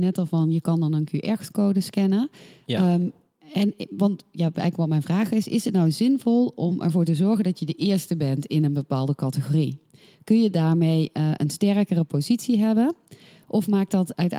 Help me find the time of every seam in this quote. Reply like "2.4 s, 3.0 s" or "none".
none